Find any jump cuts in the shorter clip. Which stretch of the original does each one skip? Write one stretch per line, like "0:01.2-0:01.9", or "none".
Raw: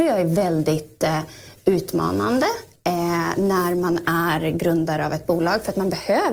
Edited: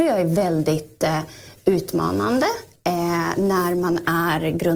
none